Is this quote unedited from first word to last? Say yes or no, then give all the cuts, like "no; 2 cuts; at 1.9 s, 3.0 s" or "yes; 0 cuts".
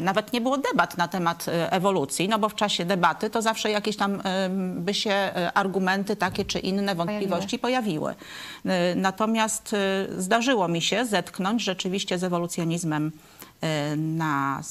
yes; 0 cuts